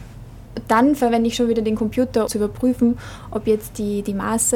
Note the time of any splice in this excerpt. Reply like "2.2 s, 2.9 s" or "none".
2.3 s

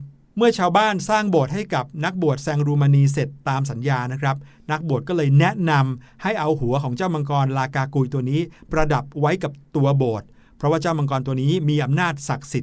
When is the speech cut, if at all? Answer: 8.7 s

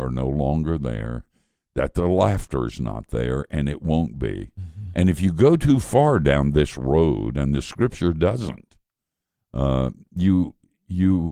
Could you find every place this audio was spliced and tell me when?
none

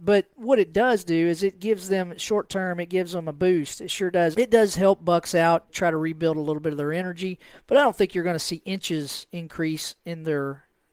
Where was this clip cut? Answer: 4.3 s, 5.7 s

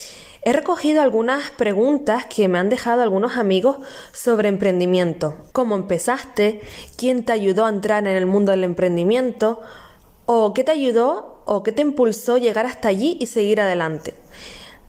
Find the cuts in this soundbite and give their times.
5.5 s

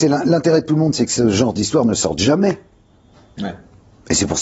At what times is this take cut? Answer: none

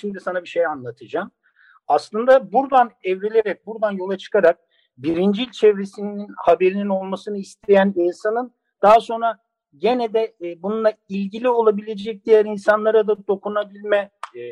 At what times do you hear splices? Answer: none

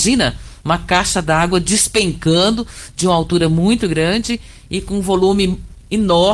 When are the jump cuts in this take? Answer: none

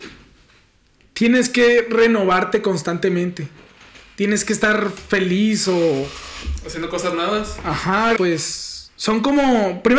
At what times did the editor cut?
8.2 s

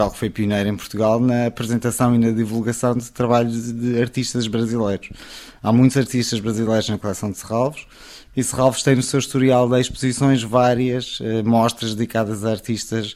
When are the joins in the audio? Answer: none

